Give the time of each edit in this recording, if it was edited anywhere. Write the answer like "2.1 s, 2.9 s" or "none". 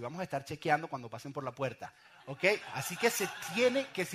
none